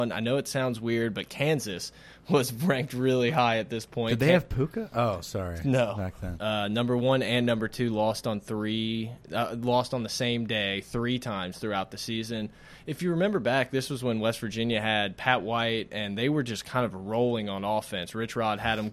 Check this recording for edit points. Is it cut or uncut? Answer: cut